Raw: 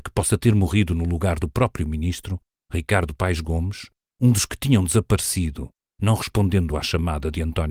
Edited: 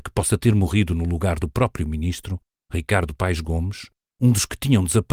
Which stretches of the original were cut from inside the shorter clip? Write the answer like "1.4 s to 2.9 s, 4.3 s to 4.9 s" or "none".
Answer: none